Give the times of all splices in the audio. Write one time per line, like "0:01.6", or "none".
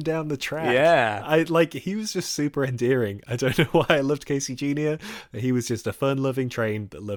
none